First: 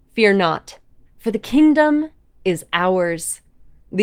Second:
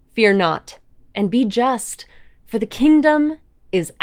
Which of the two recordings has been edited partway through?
first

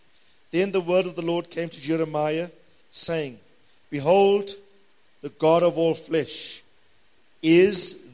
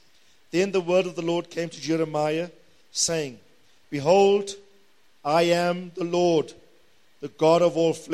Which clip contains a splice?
first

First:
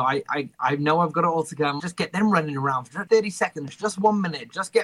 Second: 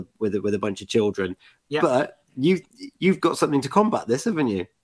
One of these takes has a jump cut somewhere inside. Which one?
first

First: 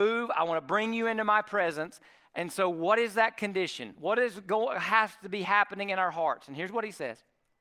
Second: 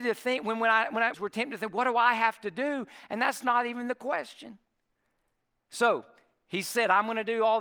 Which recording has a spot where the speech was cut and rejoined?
second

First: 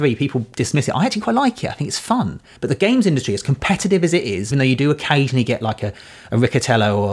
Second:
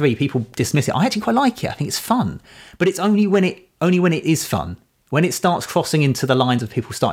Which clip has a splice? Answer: first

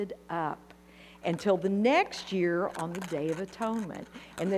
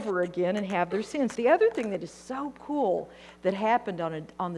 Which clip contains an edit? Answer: second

